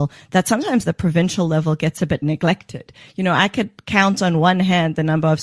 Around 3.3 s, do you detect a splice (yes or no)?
no